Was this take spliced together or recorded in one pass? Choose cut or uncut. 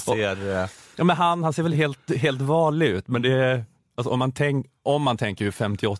uncut